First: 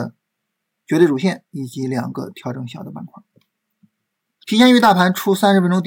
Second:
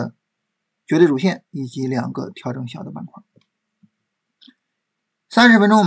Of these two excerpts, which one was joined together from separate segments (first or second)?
first